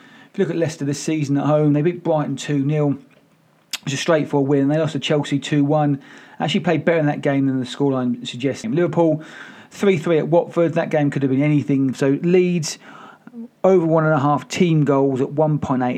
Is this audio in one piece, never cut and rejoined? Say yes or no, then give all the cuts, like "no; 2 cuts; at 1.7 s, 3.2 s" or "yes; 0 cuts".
no; 3 cuts; at 8.6 s, 11.9 s, 13.6 s